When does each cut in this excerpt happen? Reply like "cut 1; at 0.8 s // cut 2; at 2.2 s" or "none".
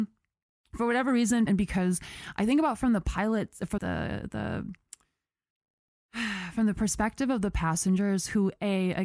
cut 1; at 1.5 s // cut 2; at 3.8 s